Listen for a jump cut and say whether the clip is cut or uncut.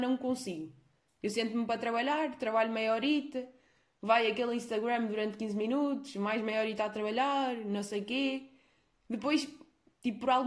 uncut